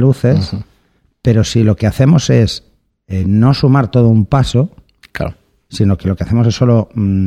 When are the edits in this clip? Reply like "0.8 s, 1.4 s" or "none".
none